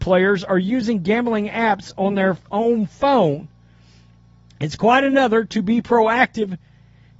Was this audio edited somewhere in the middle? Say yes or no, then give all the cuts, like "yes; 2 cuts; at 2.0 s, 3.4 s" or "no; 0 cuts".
no; 0 cuts